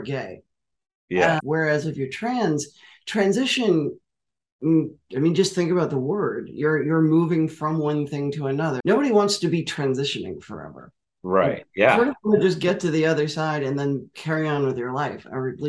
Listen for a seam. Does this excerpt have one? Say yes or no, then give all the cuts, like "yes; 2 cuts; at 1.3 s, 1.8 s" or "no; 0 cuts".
yes; 2 cuts; at 1.4 s, 8.8 s